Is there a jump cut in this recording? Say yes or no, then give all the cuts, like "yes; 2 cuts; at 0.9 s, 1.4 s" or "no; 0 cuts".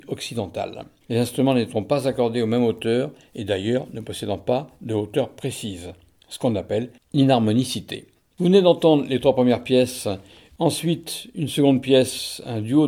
yes; 3 cuts; at 1.0 s, 8.3 s, 10.5 s